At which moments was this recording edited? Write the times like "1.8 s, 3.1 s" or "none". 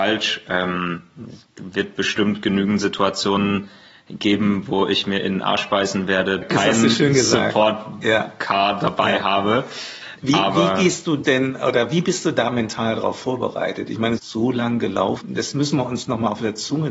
6.4 s, 14.2 s, 15.2 s